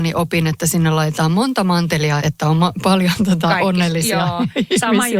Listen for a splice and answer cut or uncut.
cut